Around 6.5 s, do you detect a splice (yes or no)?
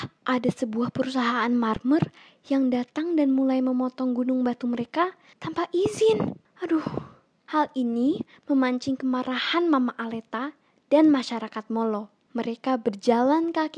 no